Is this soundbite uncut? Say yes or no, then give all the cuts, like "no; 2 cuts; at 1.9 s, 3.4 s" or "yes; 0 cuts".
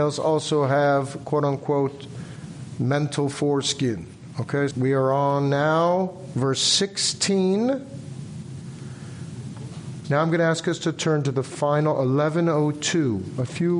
no; 2 cuts; at 4.7 s, 10.0 s